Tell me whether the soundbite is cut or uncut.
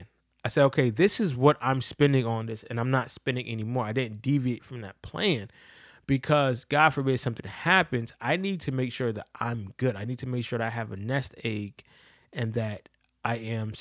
uncut